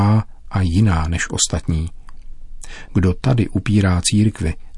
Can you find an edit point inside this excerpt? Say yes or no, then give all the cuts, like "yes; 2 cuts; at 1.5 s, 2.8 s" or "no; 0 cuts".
yes; 1 cut; at 2.9 s